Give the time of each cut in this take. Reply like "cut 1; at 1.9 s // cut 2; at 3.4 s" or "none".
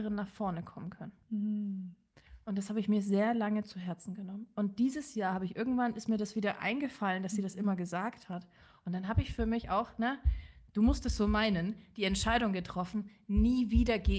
none

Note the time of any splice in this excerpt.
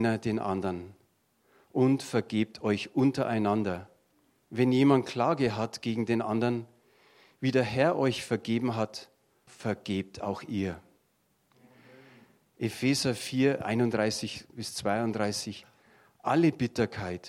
cut 1; at 9.5 s

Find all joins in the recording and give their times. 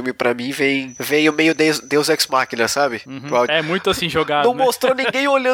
cut 1; at 3.5 s

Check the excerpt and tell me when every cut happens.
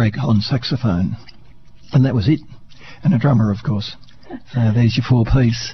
none

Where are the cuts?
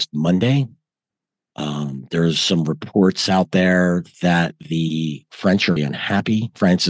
cut 1; at 5.8 s

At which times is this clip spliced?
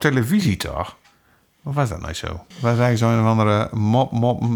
cut 1; at 2.5 s

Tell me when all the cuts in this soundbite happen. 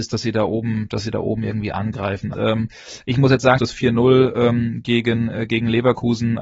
cut 1; at 2.3 s // cut 2; at 3.6 s

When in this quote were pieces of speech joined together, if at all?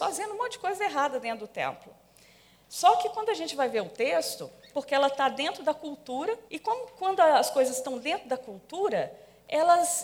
cut 1; at 4.7 s // cut 2; at 6.5 s

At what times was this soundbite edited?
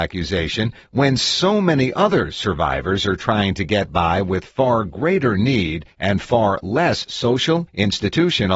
none

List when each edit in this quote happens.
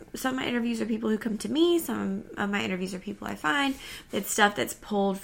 cut 1; at 4.1 s

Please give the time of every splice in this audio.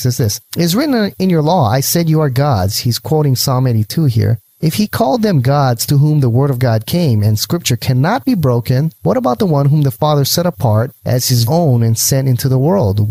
cut 1; at 11.4 s

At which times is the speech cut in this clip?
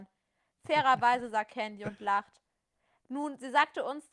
none

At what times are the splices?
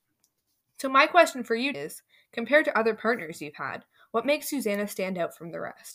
cut 1; at 1.7 s

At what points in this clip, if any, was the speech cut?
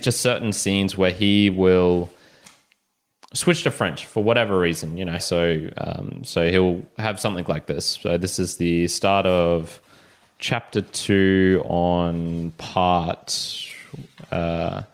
cut 1; at 5.2 s

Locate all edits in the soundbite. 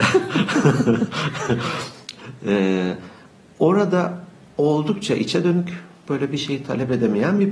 cut 1; at 6.0 s

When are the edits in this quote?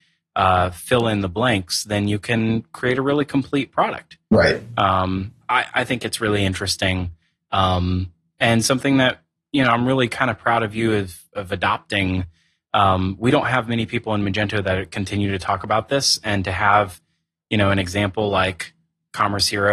cut 1; at 5.4 s

